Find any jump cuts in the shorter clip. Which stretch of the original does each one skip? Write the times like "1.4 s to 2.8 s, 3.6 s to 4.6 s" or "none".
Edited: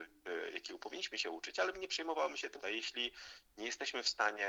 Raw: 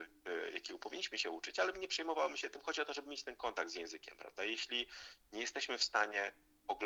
2.6 s to 4.4 s